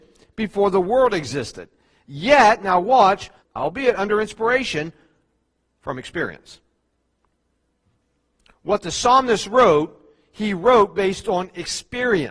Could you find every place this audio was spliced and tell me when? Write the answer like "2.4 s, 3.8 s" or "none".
3.4 s